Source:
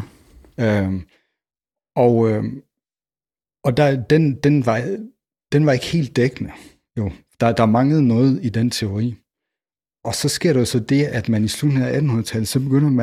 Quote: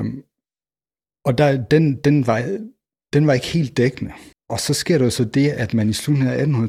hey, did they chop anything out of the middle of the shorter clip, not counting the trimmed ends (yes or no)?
yes